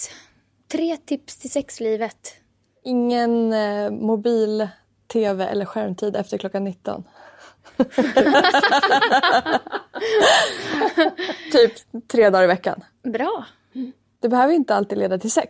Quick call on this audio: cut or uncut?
uncut